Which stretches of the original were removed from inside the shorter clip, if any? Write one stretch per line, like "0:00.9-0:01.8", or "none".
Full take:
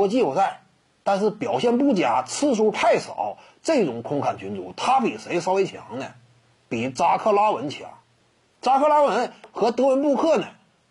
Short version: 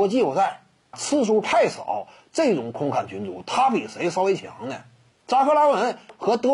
0:00.9-0:02.2
0:06.4-0:08.5